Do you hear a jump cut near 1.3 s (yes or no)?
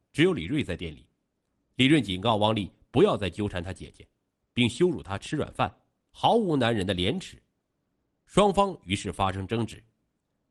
no